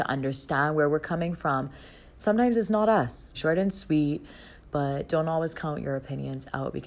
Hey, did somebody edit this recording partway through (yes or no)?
yes